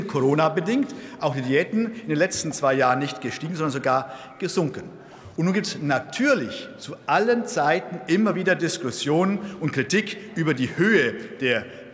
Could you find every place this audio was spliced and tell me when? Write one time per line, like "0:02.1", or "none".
none